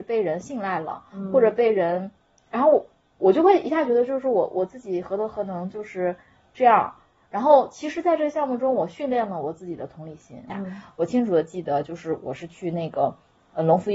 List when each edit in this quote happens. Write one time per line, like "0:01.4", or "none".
0:10.5